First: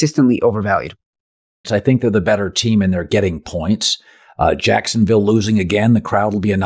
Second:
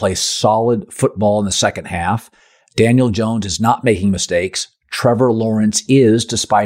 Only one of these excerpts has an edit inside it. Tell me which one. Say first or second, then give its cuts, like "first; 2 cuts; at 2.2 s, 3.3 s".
first; 1 cut; at 1.6 s